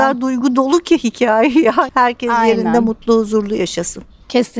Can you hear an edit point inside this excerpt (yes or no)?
yes